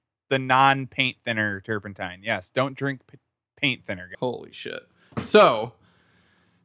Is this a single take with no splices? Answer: no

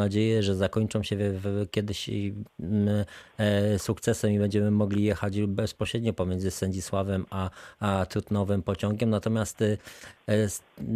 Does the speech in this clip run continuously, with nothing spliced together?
yes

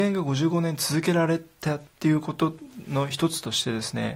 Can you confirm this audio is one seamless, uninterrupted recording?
no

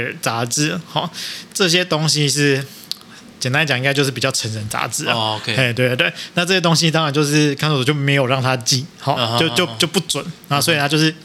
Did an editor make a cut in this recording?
no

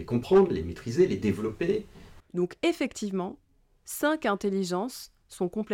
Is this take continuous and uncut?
no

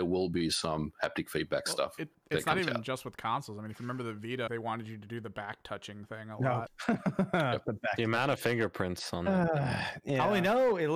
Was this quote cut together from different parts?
yes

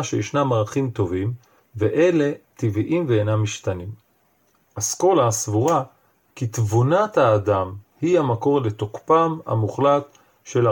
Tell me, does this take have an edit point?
yes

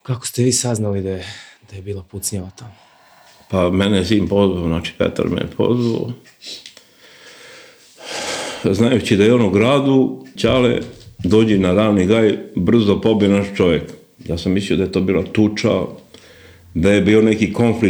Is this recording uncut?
no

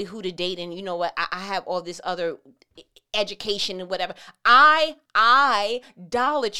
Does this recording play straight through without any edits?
no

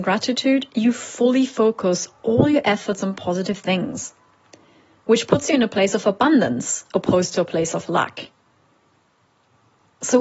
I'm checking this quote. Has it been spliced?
no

